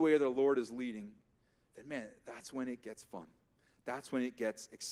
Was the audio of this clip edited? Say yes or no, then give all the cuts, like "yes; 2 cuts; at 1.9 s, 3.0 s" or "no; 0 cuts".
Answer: no; 0 cuts